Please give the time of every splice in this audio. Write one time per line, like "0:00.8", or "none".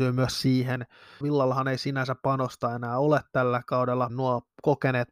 0:01.2
0:04.1